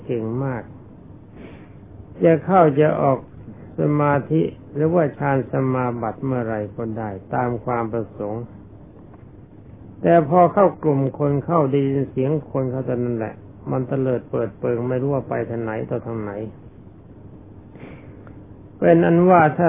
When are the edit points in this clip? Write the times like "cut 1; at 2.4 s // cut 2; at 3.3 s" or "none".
none

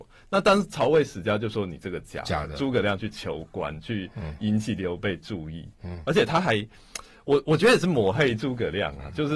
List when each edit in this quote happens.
none

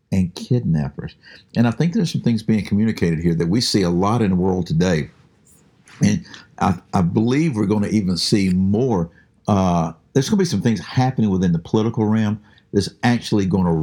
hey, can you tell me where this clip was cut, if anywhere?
none

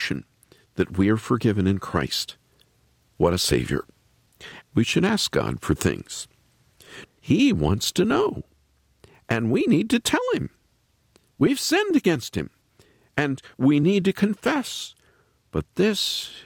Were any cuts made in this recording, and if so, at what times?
cut 1; at 4.6 s // cut 2; at 7.0 s

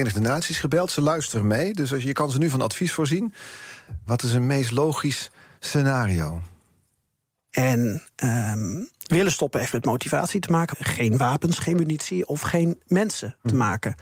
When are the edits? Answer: cut 1; at 4.1 s // cut 2; at 7.5 s // cut 3; at 10.7 s

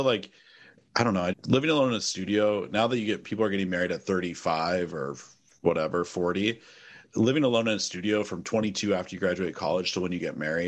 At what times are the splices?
cut 1; at 1.3 s

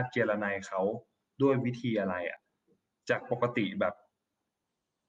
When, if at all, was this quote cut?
none

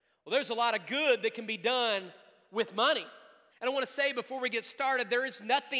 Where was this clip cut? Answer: cut 1; at 3.5 s

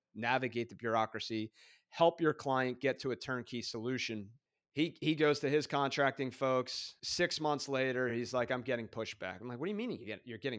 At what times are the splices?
none

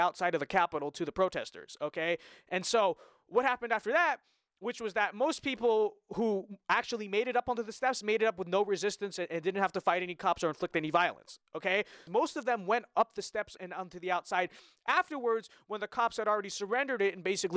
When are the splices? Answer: cut 1; at 12.1 s // cut 2; at 13.6 s

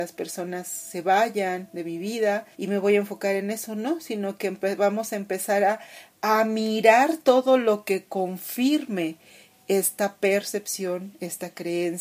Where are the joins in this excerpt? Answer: cut 1; at 2.5 s

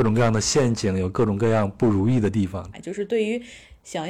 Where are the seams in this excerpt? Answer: cut 1; at 2.7 s

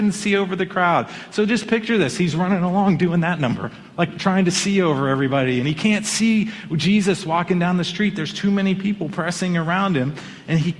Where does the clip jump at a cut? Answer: none

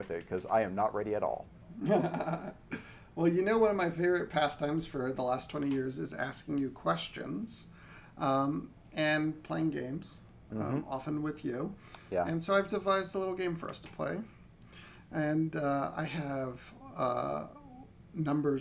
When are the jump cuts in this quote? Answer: none

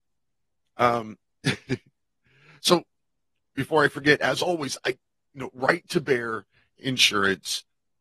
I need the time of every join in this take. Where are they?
none

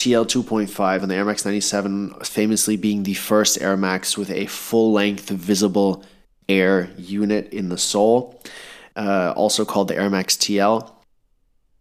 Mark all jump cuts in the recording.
cut 1; at 1.0 s

